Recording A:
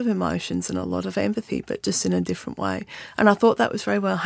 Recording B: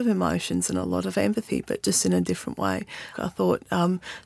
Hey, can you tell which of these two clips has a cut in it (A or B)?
B